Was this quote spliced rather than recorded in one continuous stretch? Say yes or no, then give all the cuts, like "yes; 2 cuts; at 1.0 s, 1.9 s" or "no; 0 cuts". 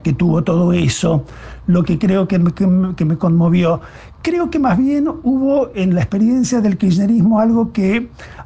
no; 0 cuts